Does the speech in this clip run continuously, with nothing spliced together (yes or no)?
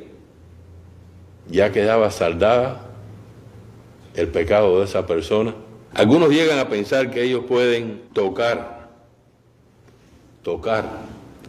no